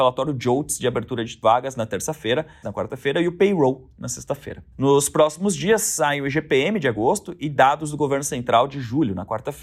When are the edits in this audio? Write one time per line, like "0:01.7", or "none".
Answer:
0:02.6
0:04.7